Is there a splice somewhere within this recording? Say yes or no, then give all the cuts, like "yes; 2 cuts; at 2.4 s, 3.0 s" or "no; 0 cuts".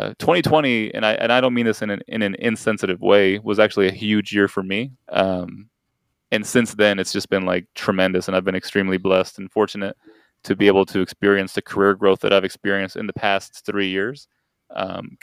yes; 1 cut; at 4.9 s